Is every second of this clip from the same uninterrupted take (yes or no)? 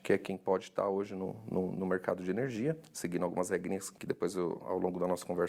yes